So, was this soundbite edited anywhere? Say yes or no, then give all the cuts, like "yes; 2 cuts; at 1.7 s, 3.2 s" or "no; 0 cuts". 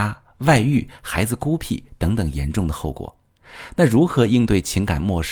no; 0 cuts